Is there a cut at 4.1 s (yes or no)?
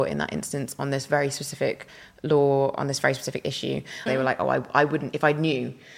yes